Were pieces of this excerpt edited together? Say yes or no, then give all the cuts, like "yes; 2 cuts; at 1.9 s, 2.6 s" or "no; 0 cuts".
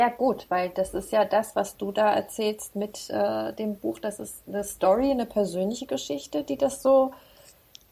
no; 0 cuts